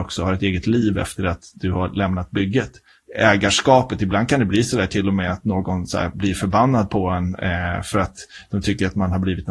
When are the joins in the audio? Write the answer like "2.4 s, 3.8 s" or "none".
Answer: none